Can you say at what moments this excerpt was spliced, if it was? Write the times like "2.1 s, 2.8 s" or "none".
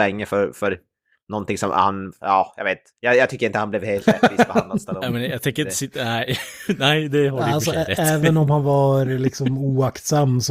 none